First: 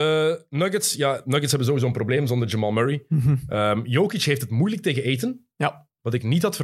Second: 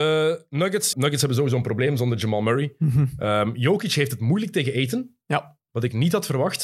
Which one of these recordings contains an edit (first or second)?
second